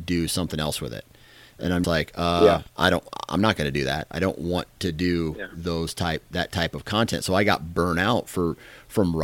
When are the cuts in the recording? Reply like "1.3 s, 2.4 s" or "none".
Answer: 1.8 s